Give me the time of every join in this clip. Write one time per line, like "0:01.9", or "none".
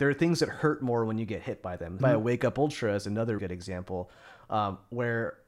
0:02.0
0:03.4